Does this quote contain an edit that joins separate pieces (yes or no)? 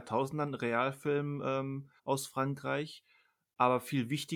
yes